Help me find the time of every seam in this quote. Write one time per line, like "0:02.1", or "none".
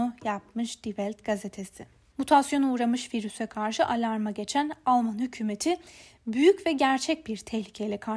0:02.1